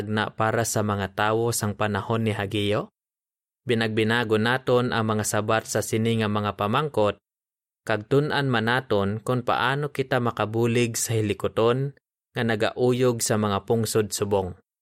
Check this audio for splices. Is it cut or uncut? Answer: cut